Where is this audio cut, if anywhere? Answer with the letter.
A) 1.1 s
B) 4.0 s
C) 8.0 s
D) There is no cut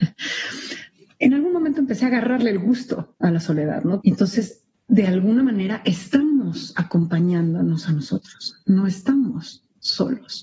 B